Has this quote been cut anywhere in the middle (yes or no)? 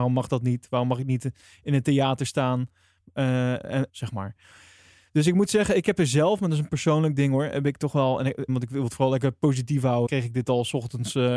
yes